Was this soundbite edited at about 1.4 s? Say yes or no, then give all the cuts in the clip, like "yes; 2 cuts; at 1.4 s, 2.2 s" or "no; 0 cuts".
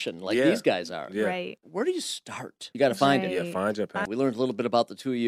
no; 2 cuts; at 2.7 s, 4.1 s